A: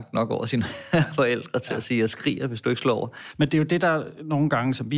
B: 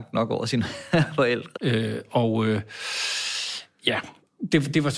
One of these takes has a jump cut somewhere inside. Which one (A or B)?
B